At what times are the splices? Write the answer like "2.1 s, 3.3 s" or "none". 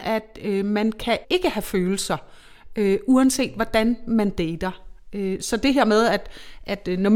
1.2 s